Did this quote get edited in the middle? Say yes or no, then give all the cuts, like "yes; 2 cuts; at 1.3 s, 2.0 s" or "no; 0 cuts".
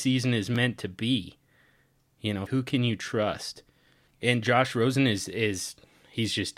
yes; 1 cut; at 2.5 s